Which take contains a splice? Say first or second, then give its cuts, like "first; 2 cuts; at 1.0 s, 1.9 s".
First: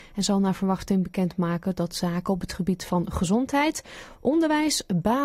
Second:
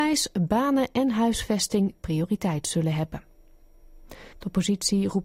second; 1 cut; at 4.3 s